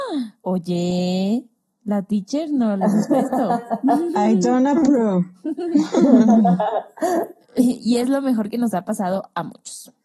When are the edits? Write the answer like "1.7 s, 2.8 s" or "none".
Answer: none